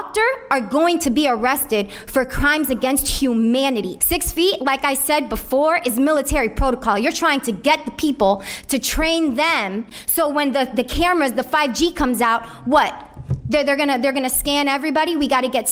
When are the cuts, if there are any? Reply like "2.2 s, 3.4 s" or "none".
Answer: none